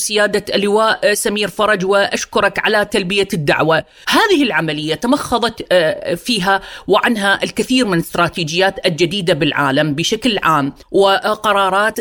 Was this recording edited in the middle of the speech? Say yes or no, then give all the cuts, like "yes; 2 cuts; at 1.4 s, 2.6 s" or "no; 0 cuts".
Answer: yes; 2 cuts; at 4.0 s, 10.8 s